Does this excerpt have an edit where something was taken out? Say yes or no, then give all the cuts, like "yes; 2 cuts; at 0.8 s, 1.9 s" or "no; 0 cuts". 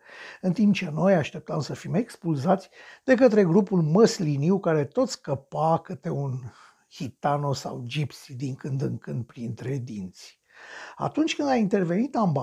no; 0 cuts